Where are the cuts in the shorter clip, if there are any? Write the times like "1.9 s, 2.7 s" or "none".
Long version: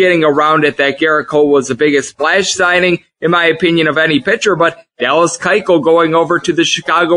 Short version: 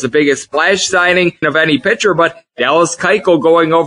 1.4 s